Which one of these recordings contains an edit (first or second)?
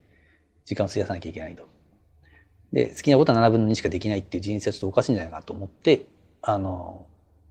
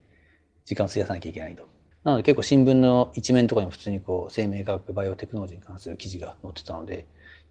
second